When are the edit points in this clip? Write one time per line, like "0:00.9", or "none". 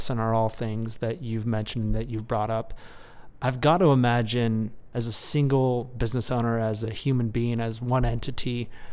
none